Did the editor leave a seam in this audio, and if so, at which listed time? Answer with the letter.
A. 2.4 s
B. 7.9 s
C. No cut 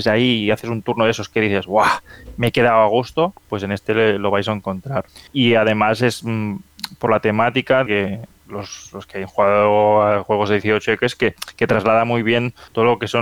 B